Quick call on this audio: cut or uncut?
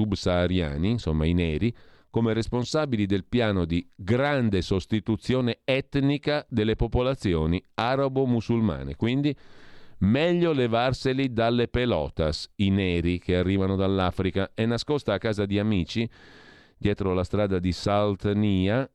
uncut